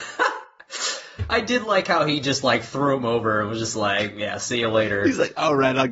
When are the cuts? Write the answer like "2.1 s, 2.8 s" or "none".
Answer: none